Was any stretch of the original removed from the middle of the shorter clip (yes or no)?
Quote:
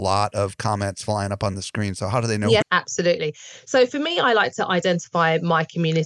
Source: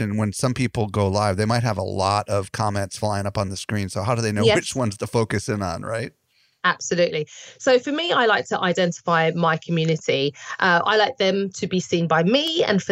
yes